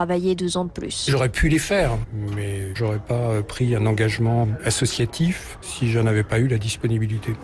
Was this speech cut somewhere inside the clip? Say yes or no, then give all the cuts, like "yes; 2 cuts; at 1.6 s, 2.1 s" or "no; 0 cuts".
no; 0 cuts